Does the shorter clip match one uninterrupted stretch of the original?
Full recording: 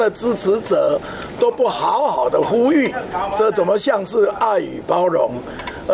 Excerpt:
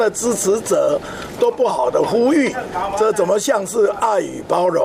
no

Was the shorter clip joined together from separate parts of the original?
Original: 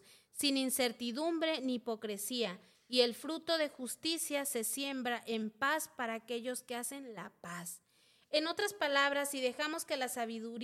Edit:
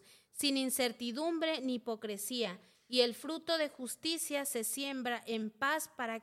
no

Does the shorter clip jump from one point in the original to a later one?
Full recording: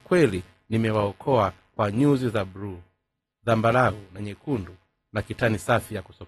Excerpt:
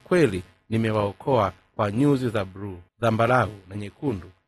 yes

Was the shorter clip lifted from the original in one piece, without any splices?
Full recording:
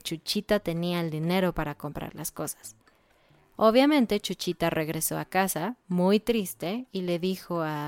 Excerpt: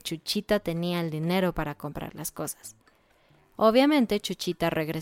yes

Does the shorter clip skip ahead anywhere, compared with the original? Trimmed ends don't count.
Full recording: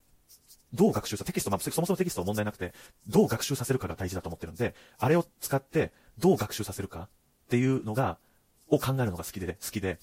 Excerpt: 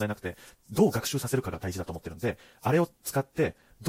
no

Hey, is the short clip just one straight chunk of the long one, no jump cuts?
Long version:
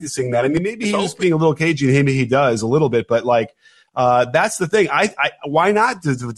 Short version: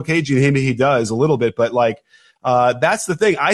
yes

